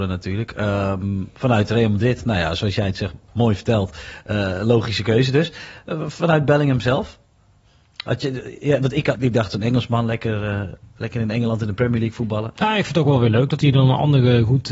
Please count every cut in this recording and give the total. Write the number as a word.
one